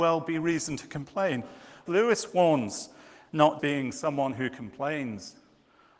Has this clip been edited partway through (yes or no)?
yes